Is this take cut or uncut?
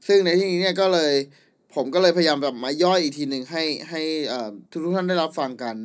cut